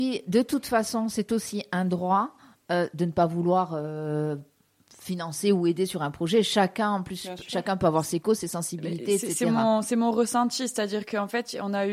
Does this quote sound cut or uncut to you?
uncut